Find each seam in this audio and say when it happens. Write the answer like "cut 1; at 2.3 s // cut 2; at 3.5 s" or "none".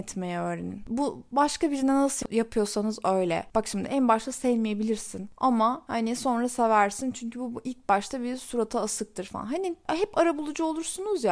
cut 1; at 3.5 s